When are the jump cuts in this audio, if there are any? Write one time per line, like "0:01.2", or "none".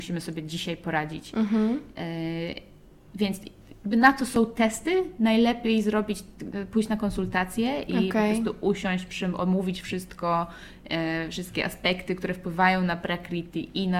none